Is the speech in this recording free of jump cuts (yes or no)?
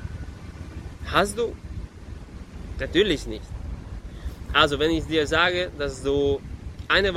yes